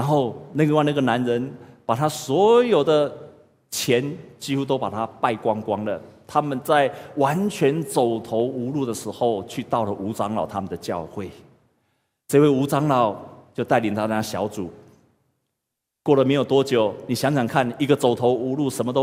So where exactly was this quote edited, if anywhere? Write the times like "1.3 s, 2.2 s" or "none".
none